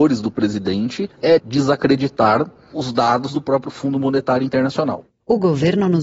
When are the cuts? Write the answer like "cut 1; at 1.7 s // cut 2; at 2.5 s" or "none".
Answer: cut 1; at 1.4 s